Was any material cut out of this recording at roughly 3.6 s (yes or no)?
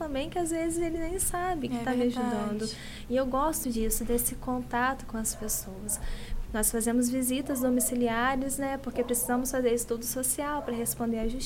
yes